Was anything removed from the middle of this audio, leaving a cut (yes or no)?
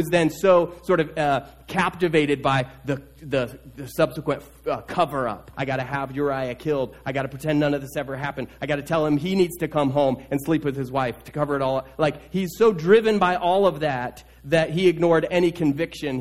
yes